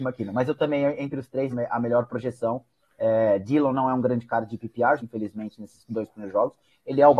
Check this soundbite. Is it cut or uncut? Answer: cut